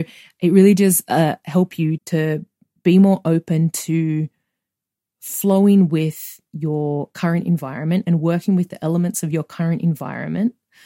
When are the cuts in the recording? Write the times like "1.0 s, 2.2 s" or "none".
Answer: 2.0 s